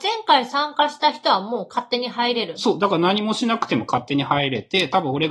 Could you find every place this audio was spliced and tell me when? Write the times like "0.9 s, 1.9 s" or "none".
none

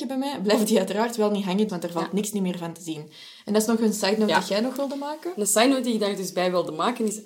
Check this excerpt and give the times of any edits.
1.7 s

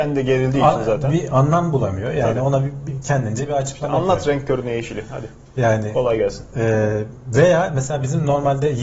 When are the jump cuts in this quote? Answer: none

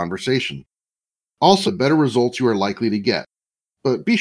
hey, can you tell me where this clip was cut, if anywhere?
1.6 s

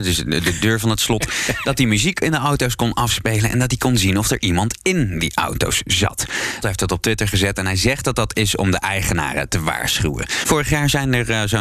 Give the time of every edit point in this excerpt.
6.6 s, 10.4 s

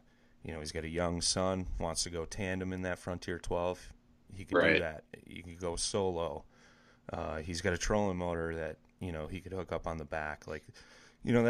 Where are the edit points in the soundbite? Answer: none

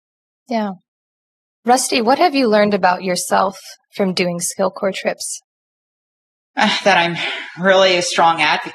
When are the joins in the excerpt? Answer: none

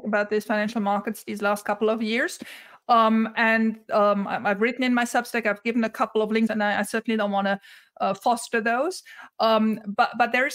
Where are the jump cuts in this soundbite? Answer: 6.5 s

